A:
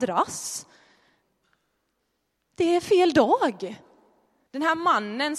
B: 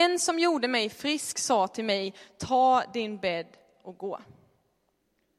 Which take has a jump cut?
A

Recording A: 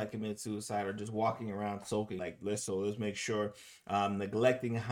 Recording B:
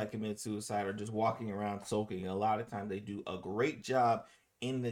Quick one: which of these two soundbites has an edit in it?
A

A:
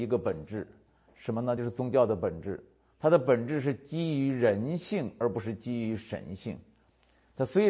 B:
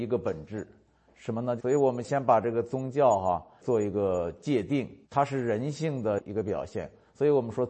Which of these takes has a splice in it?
B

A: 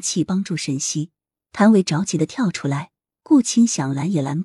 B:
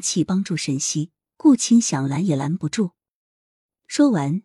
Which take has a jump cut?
B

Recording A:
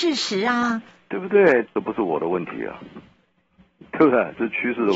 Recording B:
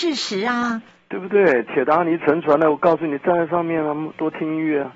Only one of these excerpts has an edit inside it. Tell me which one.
A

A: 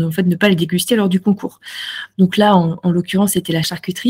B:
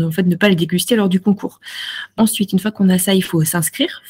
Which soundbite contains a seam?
A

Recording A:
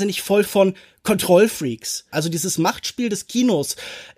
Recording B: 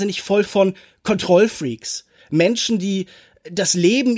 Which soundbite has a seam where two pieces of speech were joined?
A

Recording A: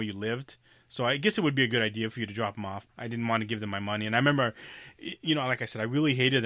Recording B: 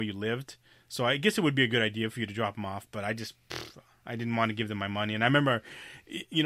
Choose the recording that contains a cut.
A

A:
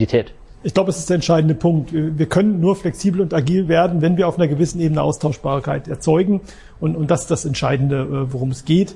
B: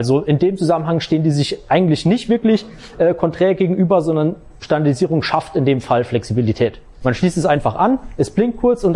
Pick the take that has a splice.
B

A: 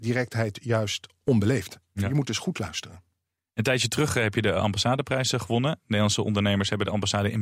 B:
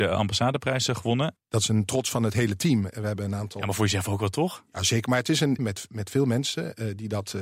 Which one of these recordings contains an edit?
B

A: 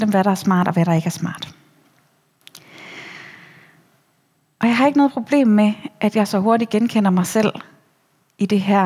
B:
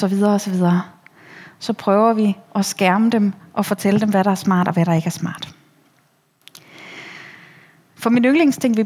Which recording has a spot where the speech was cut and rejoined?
B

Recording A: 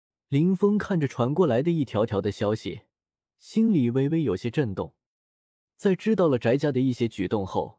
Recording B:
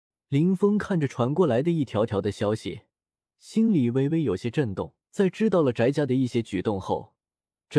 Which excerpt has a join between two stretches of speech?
B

